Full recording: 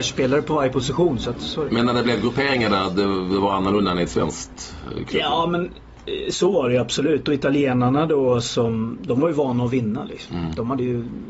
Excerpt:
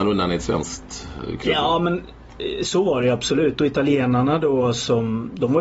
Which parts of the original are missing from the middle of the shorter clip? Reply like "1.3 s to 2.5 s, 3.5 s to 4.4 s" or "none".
none